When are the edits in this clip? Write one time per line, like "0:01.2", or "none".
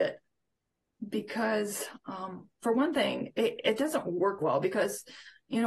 0:04.4